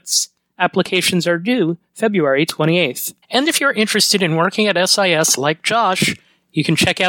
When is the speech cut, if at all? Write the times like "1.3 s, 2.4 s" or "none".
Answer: 3.2 s